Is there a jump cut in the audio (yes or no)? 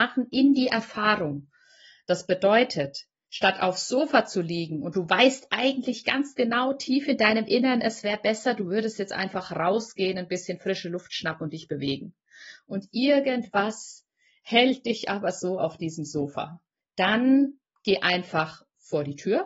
no